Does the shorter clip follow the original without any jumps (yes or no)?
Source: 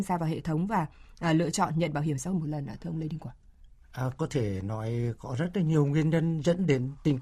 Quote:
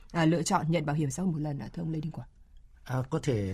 yes